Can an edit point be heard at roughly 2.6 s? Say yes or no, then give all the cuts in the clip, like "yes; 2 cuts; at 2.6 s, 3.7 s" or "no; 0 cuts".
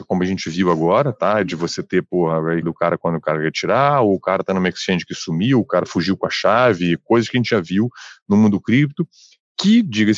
yes; 1 cut; at 2.6 s